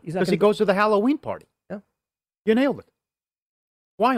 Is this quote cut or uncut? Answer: uncut